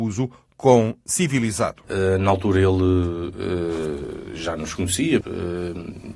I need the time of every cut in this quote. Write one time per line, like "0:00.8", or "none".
0:01.8
0:05.2